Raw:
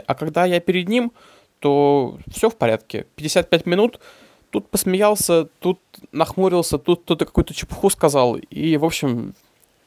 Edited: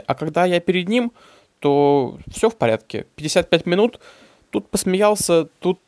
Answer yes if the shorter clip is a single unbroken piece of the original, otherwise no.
yes